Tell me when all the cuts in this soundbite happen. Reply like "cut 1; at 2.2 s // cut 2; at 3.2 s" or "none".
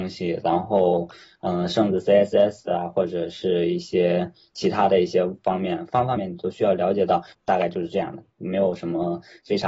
cut 1; at 6.2 s // cut 2; at 7.3 s